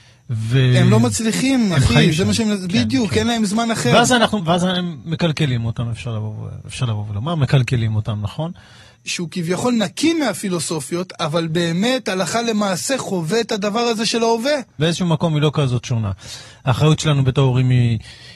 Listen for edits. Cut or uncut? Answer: cut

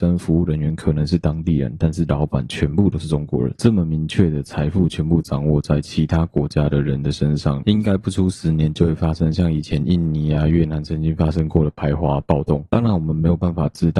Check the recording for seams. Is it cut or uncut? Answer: uncut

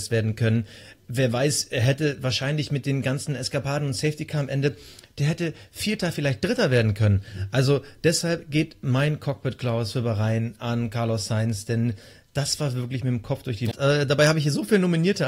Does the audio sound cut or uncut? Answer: cut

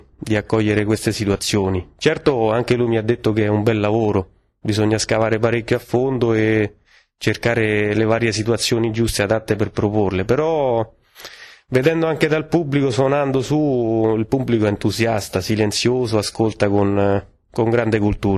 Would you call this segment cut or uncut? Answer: uncut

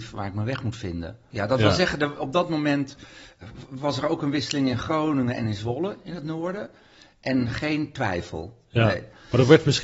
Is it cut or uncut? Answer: cut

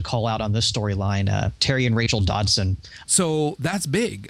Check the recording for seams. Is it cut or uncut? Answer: cut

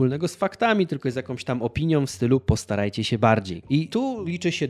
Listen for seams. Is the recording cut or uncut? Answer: cut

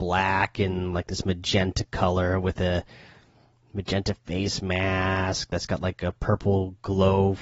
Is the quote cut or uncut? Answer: uncut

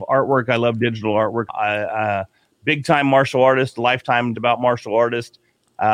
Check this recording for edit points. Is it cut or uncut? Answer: cut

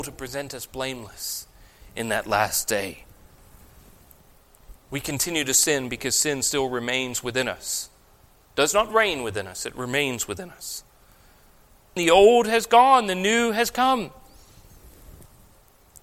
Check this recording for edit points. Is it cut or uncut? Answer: cut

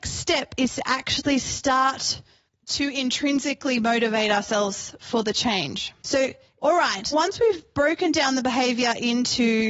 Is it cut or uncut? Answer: cut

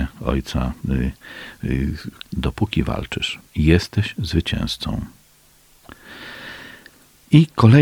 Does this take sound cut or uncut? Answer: cut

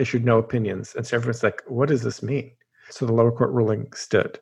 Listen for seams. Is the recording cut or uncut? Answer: cut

